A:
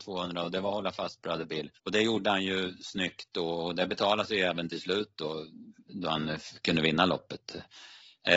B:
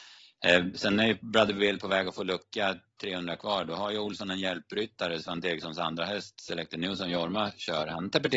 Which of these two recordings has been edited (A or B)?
A